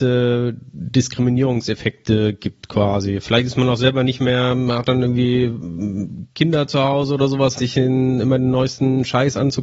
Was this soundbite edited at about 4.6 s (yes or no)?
no